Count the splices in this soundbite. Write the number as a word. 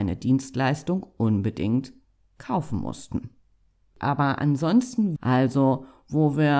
two